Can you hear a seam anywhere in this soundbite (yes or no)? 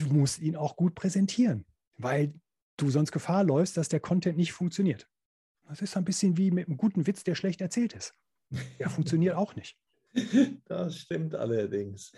no